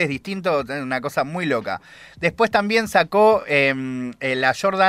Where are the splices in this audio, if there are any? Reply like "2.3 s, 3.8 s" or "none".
none